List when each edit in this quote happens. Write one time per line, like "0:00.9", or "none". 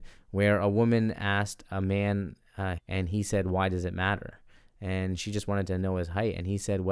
0:02.8